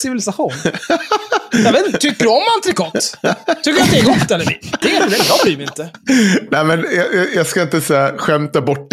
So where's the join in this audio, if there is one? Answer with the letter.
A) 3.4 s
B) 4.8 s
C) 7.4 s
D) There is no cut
B